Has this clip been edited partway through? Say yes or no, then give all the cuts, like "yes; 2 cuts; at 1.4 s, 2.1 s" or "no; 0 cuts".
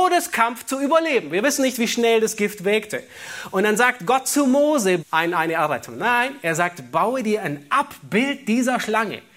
yes; 1 cut; at 5.0 s